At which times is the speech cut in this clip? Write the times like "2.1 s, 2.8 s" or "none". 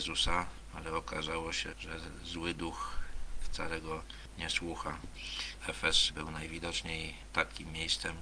1.7 s, 5.6 s